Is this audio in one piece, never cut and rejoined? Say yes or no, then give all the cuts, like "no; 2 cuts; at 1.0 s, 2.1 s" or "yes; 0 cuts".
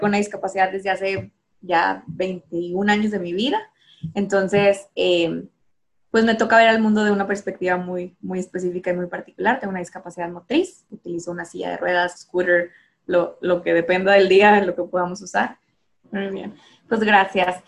no; 2 cuts; at 12.1 s, 16.0 s